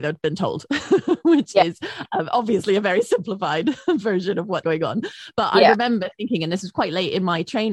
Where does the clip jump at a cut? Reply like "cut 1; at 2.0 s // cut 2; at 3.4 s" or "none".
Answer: cut 1; at 4.6 s